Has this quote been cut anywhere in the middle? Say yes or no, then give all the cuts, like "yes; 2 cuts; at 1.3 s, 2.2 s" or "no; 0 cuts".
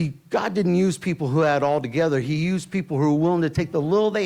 no; 0 cuts